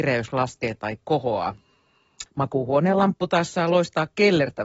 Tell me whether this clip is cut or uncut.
cut